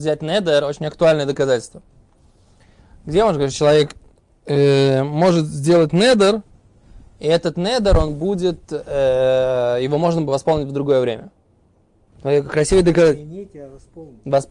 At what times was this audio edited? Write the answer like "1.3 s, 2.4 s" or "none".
none